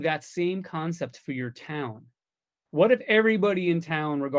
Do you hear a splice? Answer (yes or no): yes